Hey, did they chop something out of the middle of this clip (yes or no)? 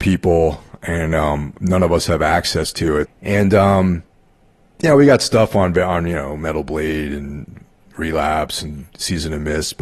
yes